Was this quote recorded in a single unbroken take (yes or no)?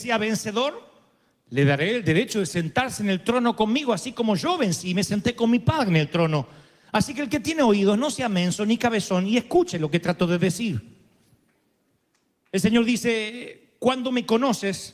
yes